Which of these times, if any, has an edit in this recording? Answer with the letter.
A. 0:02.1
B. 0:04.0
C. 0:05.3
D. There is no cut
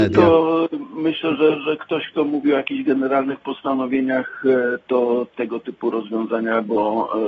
C